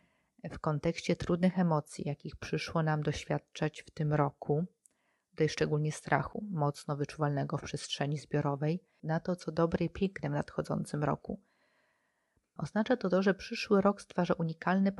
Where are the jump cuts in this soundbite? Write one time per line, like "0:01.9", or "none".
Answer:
0:09.0
0:12.6